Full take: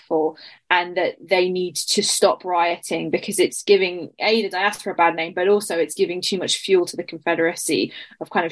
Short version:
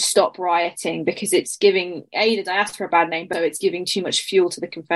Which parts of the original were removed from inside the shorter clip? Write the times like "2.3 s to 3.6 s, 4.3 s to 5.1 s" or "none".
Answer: 5.4 s to 5.7 s